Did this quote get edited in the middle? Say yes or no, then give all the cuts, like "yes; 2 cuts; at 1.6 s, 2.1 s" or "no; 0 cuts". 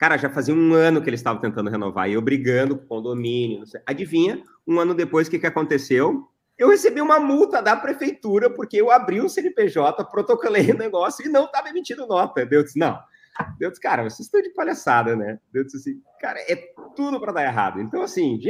no; 0 cuts